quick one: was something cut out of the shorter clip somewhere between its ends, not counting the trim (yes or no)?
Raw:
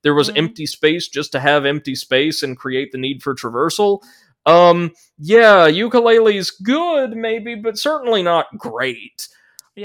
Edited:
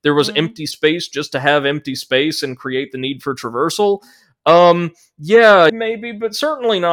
yes